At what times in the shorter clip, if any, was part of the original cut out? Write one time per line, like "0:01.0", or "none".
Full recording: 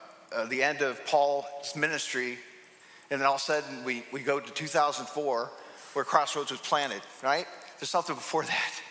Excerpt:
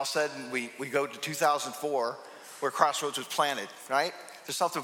none